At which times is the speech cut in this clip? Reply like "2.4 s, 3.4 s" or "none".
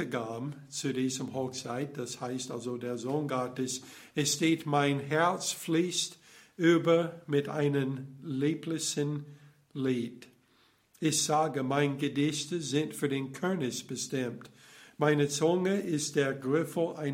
none